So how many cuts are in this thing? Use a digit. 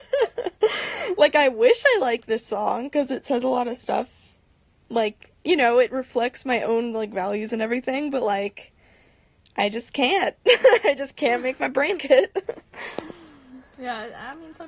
1